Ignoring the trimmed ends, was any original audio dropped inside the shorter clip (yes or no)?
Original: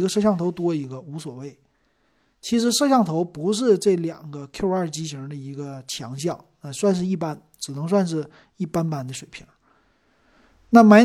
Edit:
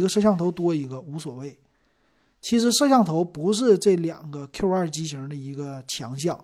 no